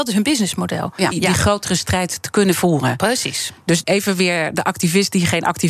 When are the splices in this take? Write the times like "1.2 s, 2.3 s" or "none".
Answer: 1.1 s, 3.8 s